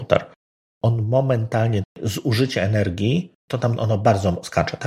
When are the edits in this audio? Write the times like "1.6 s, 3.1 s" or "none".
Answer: 1.8 s, 3.4 s